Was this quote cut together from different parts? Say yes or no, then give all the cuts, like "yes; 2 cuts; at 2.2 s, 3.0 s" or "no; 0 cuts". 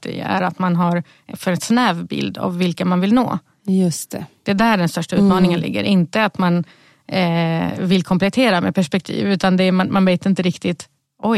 no; 0 cuts